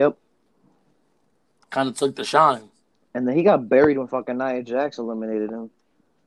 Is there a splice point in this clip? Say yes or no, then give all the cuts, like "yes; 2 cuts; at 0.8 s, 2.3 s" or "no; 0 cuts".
no; 0 cuts